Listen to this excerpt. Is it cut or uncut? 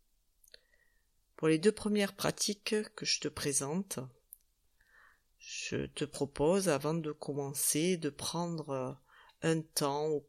uncut